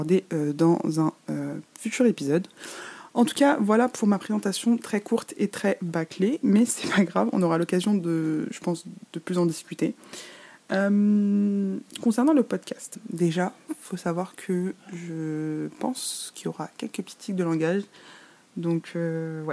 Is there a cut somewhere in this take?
no; 0 cuts

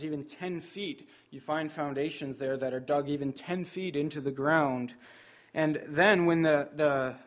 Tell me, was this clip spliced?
no; 0 cuts

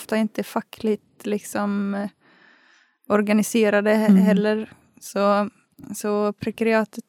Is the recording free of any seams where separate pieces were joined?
yes; 0 cuts

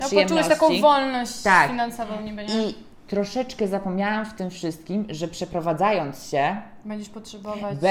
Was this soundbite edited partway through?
no; 0 cuts

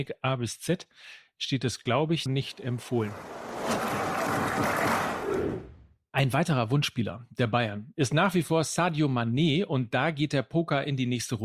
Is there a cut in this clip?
yes; 1 cut; at 2.3 s

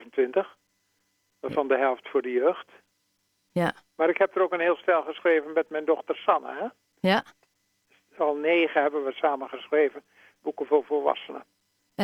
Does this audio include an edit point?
no; 0 cuts

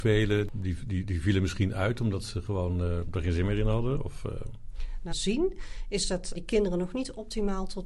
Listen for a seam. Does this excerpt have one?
yes; 2 cuts; at 5.1 s, 6.3 s

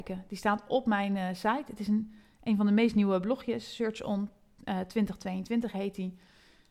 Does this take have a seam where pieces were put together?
no; 0 cuts

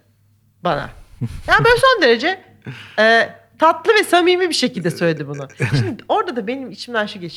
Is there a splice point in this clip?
no; 0 cuts

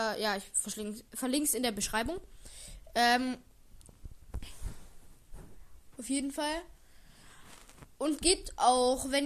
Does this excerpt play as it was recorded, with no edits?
no; 1 cut; at 5.9 s

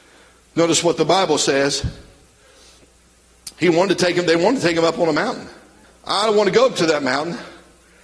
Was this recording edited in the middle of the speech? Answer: yes; 1 cut; at 5.8 s

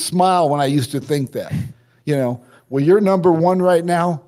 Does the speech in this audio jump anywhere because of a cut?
no; 0 cuts

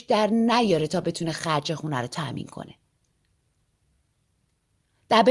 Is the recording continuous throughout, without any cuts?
yes; 0 cuts

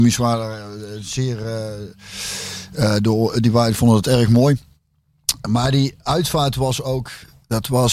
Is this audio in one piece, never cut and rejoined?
yes; 0 cuts

